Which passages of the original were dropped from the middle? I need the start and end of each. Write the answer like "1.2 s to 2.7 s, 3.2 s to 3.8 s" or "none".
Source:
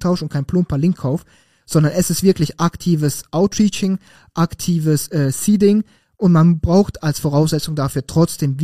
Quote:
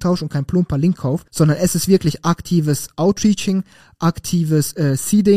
1.3 s to 1.6 s